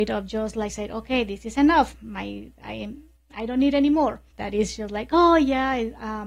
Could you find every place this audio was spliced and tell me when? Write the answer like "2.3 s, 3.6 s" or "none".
4.3 s